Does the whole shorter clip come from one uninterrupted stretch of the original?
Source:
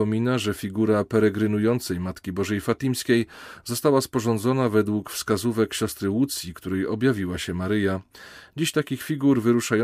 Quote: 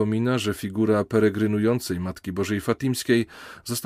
yes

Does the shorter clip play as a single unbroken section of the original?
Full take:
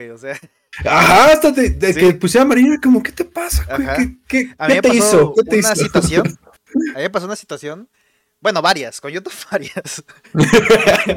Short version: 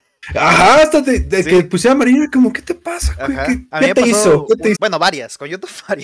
no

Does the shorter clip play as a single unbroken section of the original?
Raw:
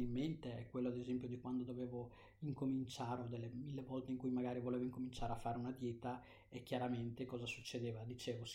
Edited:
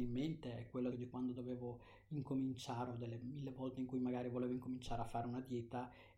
no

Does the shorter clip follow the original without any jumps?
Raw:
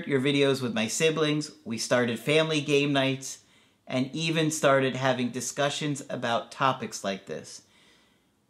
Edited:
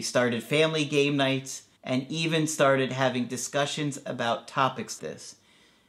no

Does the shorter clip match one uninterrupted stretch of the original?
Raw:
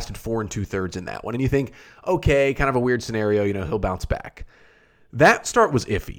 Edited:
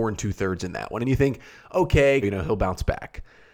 no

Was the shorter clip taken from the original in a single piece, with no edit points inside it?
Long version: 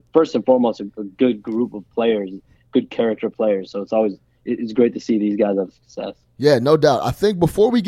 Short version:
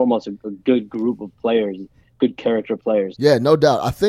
no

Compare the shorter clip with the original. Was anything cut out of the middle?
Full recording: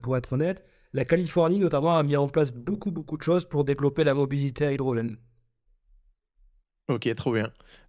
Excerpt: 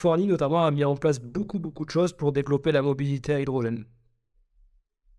no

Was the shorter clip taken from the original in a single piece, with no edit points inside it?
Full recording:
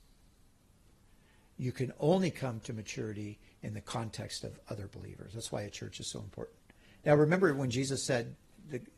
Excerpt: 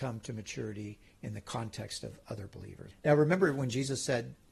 no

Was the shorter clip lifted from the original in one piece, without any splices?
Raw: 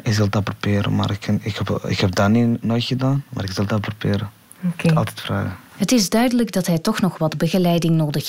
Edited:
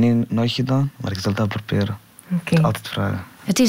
yes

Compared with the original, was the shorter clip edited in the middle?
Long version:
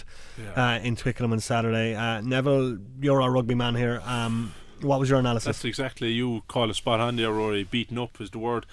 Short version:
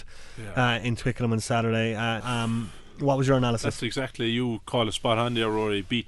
yes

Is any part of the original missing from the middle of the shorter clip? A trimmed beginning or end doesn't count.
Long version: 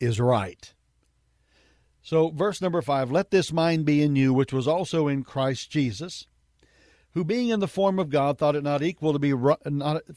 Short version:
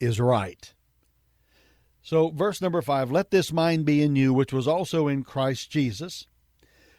no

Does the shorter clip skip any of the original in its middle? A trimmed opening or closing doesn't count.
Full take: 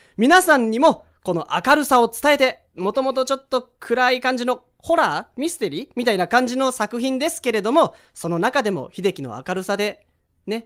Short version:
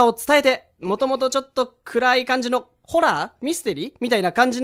no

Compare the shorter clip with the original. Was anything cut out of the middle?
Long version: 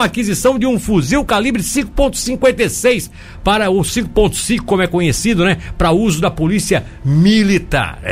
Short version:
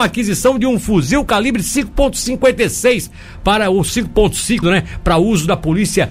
yes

